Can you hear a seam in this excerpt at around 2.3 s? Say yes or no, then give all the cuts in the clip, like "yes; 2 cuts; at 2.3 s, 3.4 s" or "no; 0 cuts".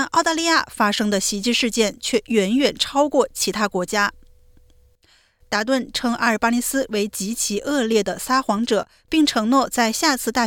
no; 1 cut; at 4.4 s